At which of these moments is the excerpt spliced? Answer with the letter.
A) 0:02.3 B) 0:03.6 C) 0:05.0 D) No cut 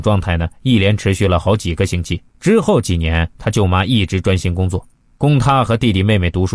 A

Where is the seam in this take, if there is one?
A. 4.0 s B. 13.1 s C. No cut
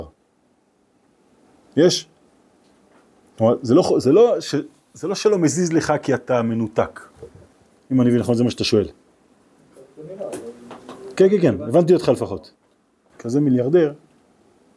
B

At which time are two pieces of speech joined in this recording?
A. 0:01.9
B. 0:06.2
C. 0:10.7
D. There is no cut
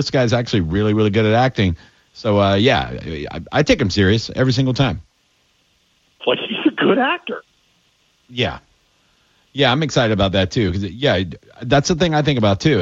B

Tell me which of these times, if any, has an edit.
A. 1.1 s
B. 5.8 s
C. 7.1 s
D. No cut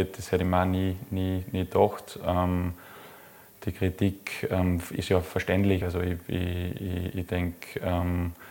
D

